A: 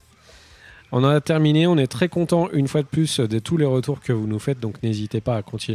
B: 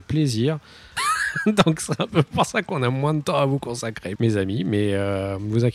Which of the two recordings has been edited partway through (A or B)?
B